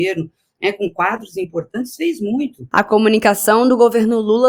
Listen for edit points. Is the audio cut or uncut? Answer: uncut